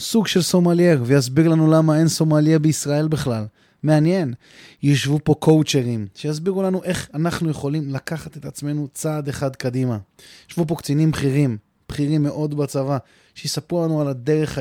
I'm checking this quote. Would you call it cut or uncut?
uncut